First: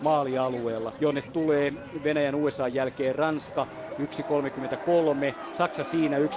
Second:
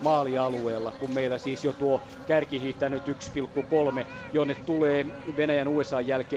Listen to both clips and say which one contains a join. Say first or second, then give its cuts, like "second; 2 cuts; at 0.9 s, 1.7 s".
first; 1 cut; at 1.0 s